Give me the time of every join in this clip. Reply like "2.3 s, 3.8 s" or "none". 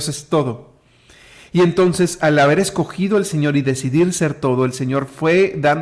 none

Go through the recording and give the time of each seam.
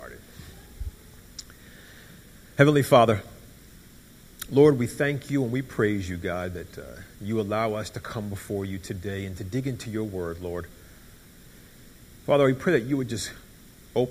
none

